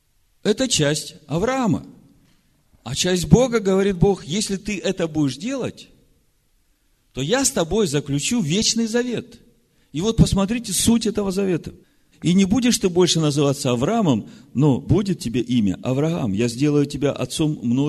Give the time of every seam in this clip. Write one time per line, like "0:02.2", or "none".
0:12.1